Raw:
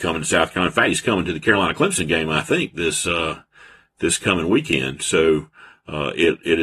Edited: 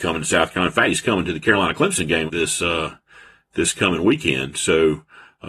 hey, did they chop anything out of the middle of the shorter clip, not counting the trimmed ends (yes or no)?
yes